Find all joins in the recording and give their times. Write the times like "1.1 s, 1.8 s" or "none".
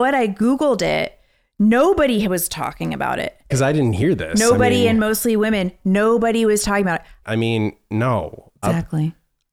3.5 s, 7.2 s, 8.6 s